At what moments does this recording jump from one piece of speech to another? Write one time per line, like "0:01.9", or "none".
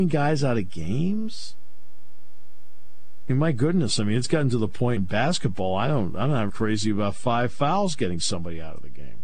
0:05.0
0:06.5

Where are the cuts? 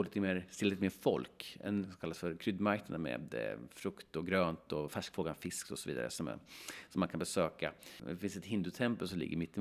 0:01.8

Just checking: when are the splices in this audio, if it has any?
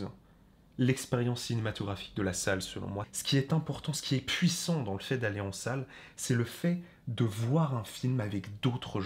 0:03.0

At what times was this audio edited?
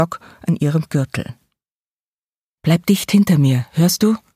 0:02.6

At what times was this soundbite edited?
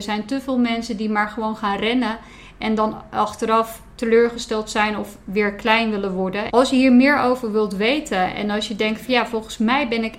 0:06.5

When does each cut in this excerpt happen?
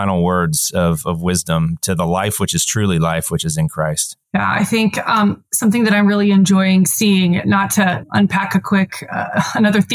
0:04.2
0:08.0

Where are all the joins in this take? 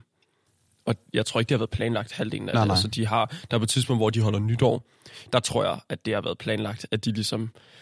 none

